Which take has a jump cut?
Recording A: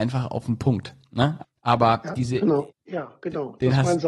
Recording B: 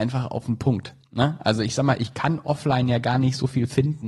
A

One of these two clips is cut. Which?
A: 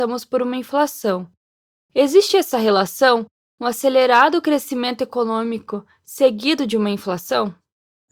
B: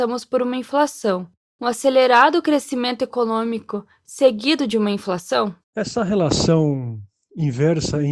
B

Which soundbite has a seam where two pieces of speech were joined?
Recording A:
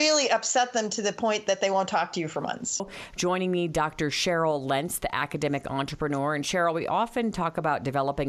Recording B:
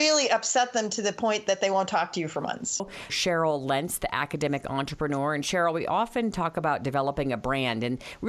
B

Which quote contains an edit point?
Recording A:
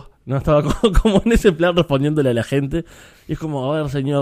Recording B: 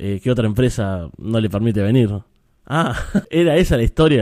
B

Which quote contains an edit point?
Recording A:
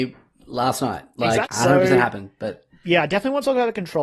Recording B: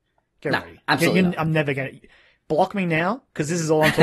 A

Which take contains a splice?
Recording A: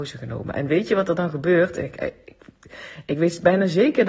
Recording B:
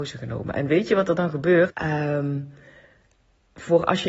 B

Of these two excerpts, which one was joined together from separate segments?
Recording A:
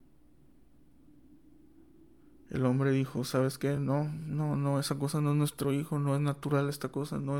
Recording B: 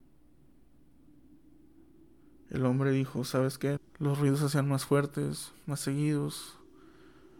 B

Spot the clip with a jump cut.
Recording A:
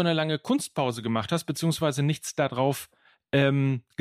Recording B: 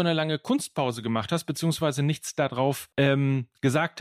B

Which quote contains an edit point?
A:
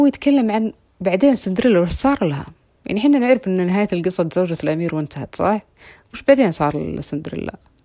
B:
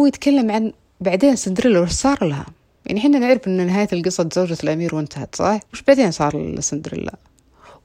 B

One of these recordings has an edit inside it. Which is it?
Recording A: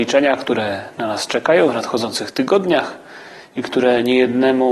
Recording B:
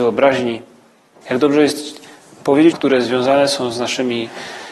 B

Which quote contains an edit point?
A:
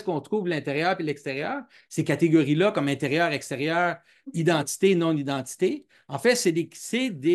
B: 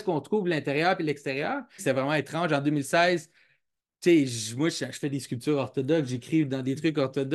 B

